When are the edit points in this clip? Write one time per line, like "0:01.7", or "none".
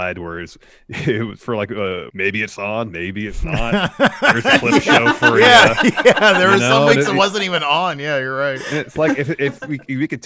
0:02.1